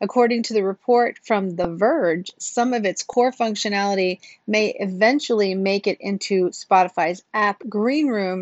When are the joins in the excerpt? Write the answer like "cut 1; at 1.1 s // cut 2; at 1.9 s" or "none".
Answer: none